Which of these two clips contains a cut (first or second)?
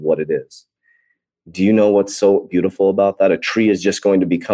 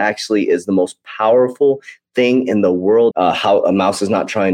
second